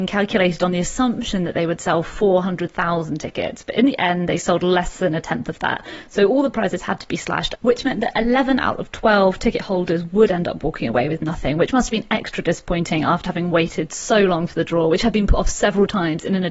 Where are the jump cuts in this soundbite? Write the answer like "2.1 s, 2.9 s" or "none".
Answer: none